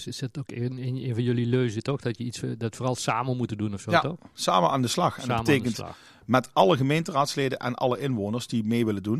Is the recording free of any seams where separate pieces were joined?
yes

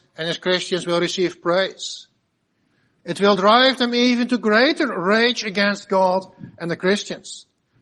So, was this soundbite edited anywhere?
yes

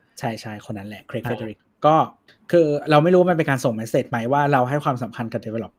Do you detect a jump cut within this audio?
no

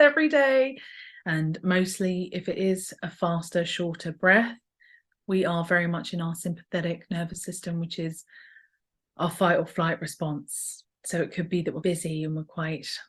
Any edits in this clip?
yes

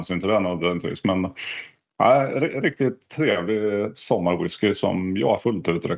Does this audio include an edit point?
no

